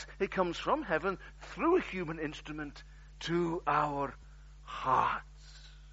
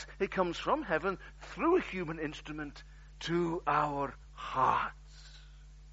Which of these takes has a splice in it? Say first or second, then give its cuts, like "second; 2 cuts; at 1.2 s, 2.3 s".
second; 1 cut; at 4.2 s